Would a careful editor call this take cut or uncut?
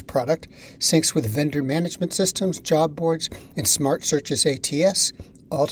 cut